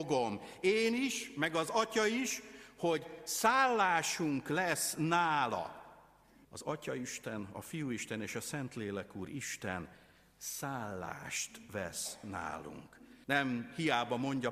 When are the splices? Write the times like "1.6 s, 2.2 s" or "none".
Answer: 6.4 s, 13.2 s